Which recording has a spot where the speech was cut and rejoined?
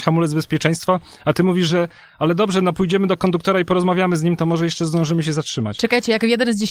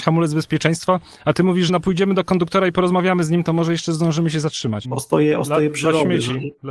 second; 2 cuts; at 1.7 s, 4.8 s

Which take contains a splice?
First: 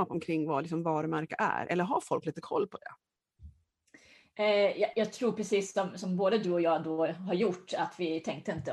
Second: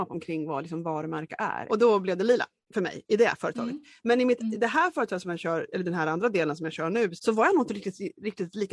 second; 2 cuts; at 1.7 s, 7.2 s

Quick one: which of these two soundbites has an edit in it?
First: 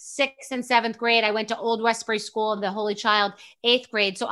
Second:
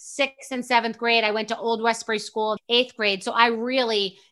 second; 1 cut; at 2.6 s

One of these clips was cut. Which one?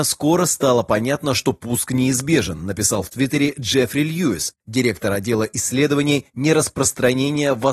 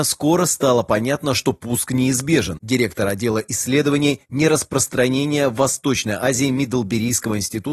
second; 1 cut; at 2.6 s

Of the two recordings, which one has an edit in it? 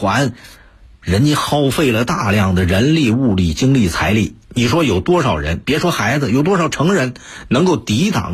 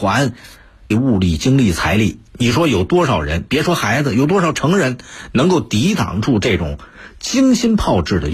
second; 1 cut; at 0.9 s

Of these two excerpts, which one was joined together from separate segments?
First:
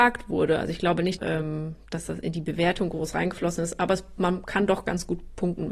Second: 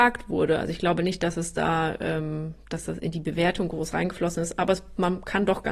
first; 1 cut; at 1.2 s

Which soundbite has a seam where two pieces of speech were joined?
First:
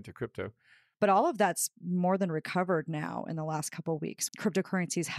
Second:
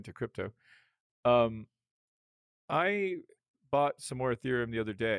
first; 2 cuts; at 0.9 s, 4.3 s

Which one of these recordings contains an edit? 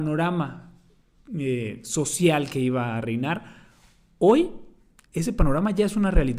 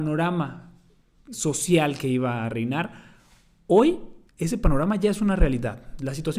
second; 2 cuts; at 1.3 s, 4.3 s

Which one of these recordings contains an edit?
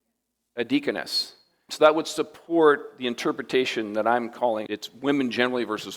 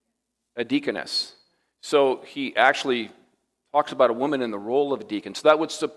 first; 2 cuts; at 1.7 s, 4.7 s

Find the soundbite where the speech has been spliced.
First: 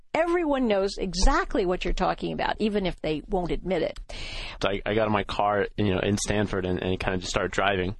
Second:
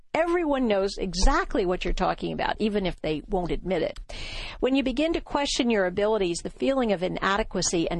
first; 1 cut; at 4.6 s

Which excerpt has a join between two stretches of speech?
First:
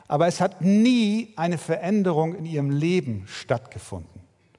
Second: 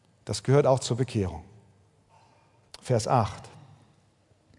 second; 1 cut; at 2.7 s

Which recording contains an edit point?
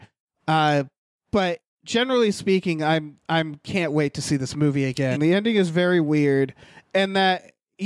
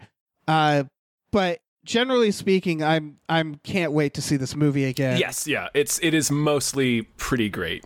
first; 1 cut; at 5.1 s

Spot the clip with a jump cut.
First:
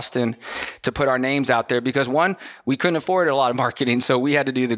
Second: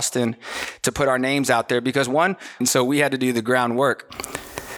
second; 1 cut; at 2.6 s

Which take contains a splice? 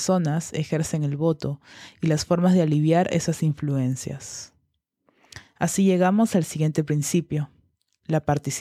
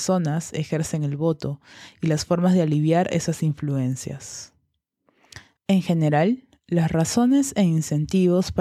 second; 1 cut; at 5.5 s

